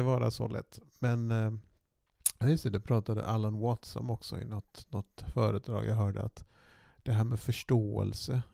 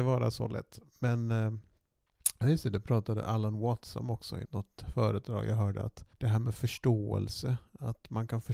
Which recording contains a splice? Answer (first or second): second